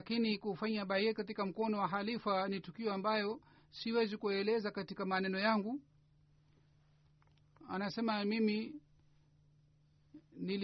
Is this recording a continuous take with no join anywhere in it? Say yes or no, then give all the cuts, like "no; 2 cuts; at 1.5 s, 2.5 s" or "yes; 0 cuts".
yes; 0 cuts